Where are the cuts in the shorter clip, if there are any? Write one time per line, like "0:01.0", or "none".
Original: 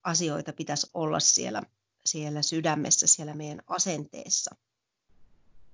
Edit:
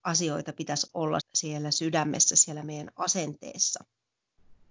0:01.2